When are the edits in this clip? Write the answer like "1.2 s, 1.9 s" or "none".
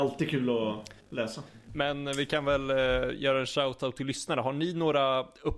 1.7 s